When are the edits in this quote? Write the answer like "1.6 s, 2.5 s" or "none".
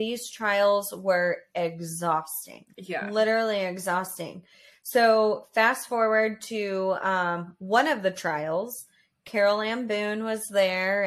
none